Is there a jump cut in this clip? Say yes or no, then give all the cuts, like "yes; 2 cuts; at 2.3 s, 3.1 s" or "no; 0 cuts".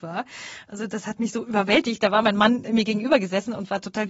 no; 0 cuts